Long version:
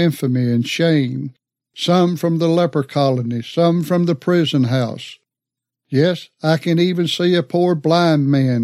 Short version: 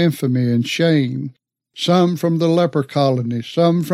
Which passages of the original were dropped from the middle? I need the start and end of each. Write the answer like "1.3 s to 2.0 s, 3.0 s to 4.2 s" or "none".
none

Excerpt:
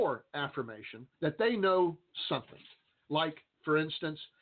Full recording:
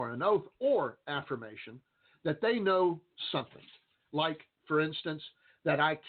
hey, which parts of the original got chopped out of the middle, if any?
1.9 s to 2.2 s

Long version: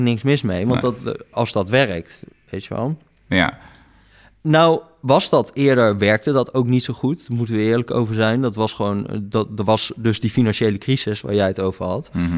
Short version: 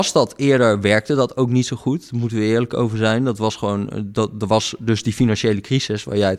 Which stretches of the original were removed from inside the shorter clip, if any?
none

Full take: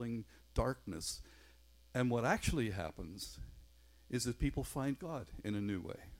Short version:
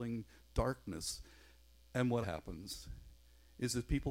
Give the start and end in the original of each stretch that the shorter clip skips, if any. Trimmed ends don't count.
2.2 s to 2.7 s

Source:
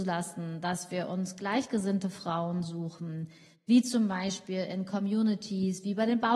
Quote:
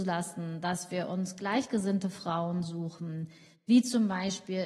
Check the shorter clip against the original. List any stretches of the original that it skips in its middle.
none

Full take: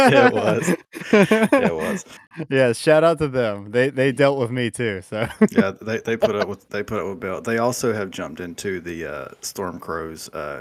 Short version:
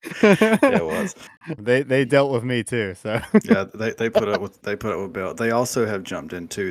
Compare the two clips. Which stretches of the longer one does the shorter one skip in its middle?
2.5 s to 3.6 s

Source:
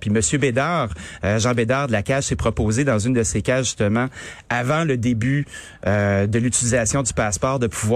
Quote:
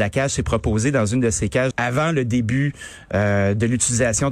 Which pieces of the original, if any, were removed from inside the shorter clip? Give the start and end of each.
3.6 s to 4.4 s

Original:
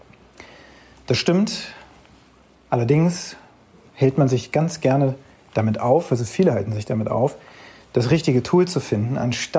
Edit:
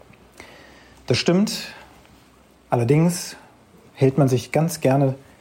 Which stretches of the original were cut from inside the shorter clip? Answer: none

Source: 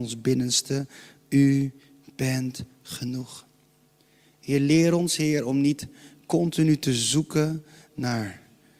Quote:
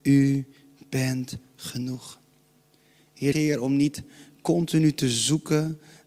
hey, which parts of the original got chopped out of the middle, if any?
4.6 s to 5.2 s

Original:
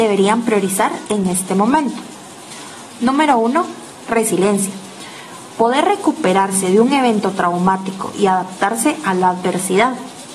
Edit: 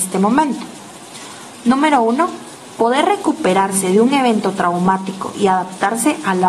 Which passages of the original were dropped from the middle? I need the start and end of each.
4.0 s to 5.5 s

